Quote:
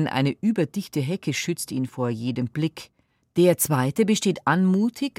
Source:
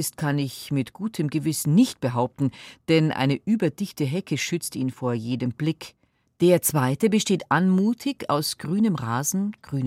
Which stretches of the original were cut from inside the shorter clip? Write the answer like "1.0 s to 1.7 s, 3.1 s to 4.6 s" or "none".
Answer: none